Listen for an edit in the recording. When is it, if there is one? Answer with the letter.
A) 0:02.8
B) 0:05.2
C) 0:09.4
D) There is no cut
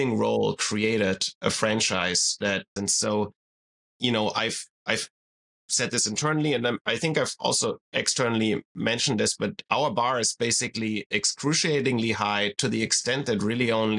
A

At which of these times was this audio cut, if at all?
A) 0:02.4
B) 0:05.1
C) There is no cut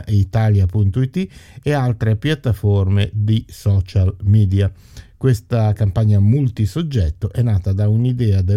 C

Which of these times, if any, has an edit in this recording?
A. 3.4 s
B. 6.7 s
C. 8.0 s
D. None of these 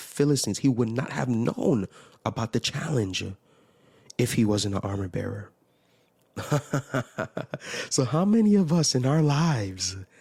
D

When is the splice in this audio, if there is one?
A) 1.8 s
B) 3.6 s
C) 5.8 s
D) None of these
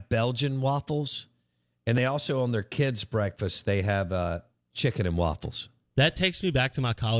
C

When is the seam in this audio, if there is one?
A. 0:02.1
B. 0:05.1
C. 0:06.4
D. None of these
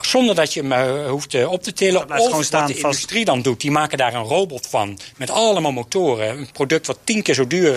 D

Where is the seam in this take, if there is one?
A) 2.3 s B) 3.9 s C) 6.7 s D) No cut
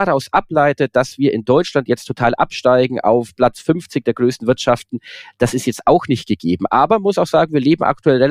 D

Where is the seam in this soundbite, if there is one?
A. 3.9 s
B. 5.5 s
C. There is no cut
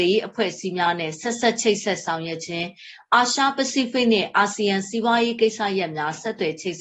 C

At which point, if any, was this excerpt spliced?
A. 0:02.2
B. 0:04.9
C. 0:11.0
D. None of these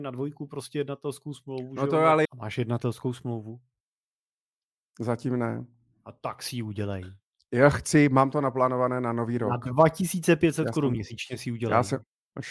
A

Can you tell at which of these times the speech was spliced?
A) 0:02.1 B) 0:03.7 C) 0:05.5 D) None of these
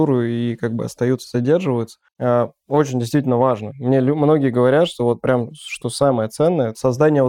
A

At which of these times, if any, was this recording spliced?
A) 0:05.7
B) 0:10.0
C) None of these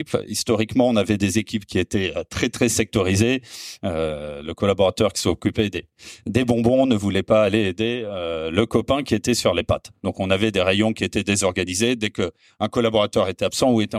C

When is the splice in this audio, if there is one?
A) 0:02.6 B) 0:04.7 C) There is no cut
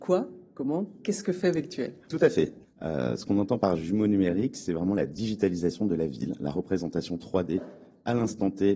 A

